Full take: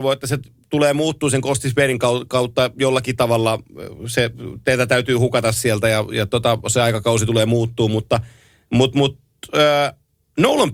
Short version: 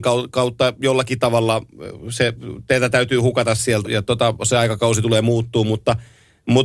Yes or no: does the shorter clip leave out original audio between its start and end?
yes